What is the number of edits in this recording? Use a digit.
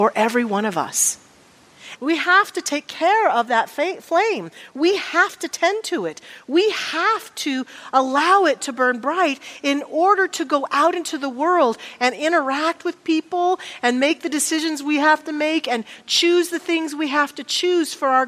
1